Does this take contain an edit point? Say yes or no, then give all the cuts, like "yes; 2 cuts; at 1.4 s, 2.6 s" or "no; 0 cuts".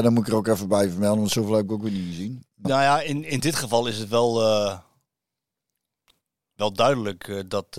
yes; 1 cut; at 2.6 s